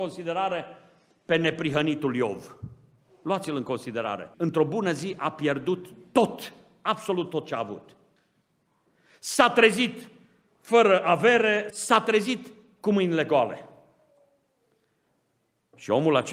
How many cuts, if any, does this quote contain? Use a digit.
2